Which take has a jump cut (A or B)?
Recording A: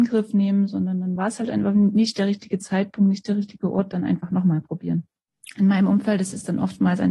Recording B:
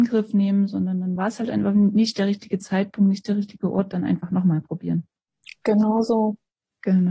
A